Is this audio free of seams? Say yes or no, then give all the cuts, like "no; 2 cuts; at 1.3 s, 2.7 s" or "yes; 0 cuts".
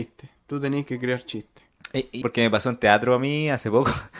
no; 1 cut; at 2.2 s